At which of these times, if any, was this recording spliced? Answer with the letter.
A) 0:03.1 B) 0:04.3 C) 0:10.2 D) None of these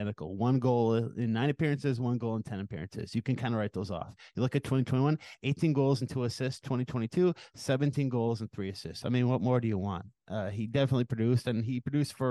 D